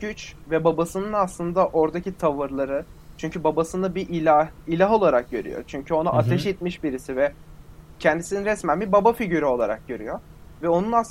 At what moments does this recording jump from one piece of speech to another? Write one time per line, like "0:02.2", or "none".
none